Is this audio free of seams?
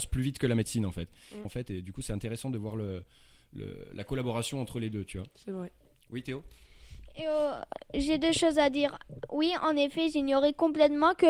no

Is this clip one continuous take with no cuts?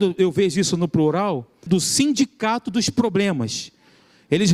no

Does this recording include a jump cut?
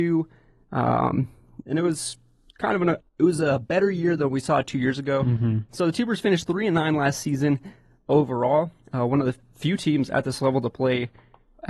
yes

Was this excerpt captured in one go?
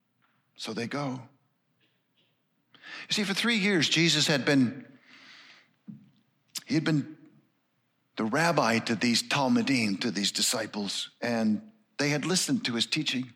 yes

